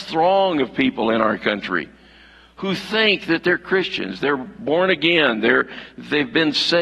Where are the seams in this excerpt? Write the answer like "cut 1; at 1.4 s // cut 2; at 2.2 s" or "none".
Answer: none